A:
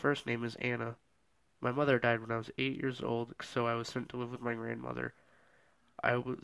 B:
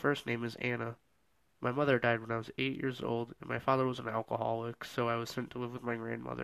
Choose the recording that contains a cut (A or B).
A